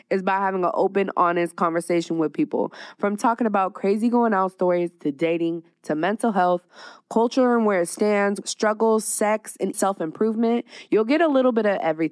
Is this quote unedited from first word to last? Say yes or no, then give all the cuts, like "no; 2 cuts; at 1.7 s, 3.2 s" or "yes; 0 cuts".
no; 2 cuts; at 8.4 s, 9.7 s